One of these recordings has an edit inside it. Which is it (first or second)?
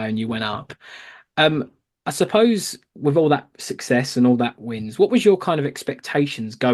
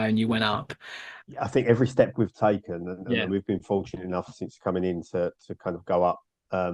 second